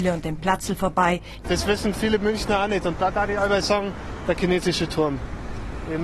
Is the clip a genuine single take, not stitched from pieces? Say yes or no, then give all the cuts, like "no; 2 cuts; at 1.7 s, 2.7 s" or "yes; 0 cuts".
no; 1 cut; at 1.4 s